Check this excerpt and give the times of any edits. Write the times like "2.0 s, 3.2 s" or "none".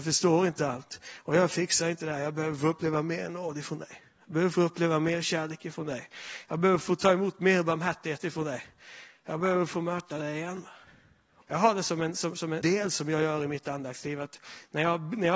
11.4 s, 12.6 s